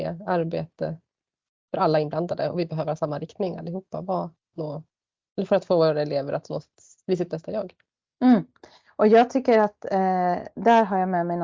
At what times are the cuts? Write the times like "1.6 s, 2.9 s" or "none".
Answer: 4.5 s